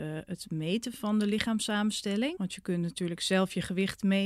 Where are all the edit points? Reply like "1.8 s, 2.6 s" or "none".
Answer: 2.4 s